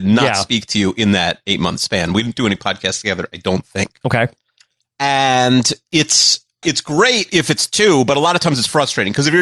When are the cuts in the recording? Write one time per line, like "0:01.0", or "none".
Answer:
0:04.0
0:06.6